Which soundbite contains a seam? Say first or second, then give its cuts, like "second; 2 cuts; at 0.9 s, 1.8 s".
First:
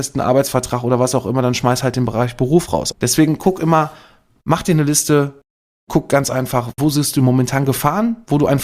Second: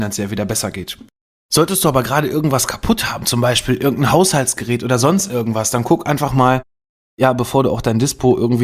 first; 2 cuts; at 2.9 s, 6.8 s